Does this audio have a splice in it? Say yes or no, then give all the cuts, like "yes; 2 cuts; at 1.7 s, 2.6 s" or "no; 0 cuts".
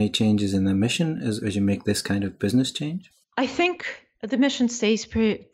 no; 0 cuts